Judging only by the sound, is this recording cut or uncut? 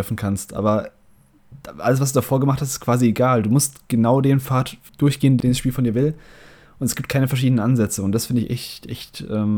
uncut